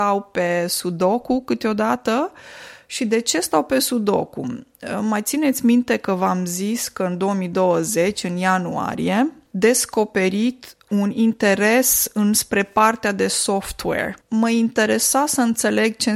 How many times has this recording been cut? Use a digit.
2